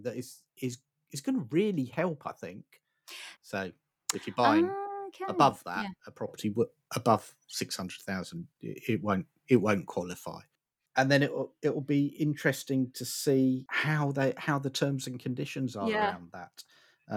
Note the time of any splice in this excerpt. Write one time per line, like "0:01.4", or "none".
0:03.4